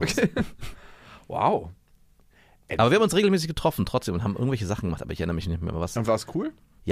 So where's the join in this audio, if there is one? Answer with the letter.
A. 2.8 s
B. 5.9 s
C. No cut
C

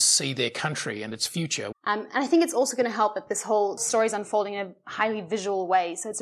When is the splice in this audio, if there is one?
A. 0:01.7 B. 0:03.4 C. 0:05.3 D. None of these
A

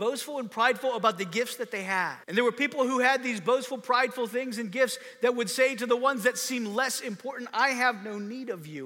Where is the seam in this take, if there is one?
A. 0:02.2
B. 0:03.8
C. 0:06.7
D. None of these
A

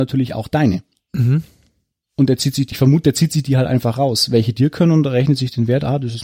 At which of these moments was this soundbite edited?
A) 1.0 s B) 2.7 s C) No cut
B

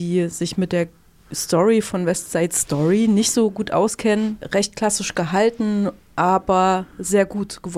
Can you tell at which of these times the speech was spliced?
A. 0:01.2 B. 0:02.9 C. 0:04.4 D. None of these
C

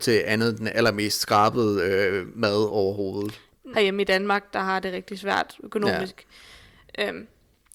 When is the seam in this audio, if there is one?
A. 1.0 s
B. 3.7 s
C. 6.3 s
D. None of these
B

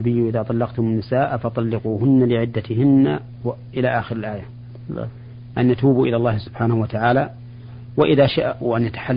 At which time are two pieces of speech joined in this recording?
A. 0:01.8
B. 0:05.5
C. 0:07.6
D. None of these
B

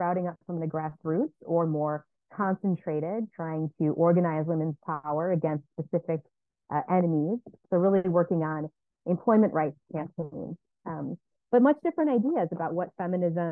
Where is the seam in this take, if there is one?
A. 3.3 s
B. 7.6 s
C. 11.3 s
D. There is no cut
B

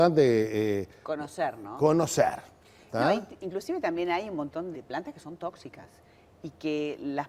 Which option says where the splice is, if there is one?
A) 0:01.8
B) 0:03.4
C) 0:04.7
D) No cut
C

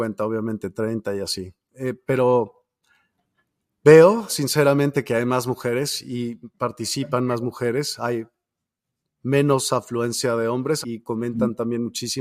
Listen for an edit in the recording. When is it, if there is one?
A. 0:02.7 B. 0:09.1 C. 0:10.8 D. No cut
C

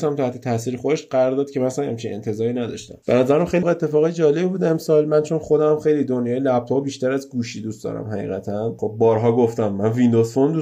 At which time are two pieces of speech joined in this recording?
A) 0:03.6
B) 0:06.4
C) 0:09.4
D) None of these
A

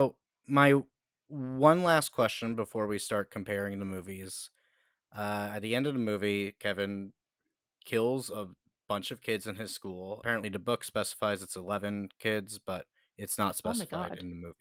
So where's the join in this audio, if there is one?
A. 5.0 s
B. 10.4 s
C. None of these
C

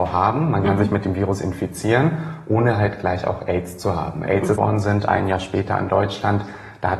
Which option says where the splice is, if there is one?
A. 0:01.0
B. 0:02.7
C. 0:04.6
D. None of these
C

